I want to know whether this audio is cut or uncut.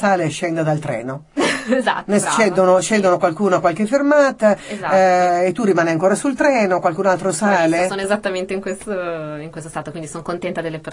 uncut